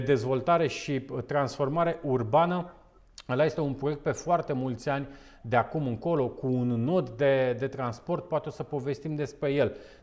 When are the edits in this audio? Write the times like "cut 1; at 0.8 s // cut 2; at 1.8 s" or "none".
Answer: none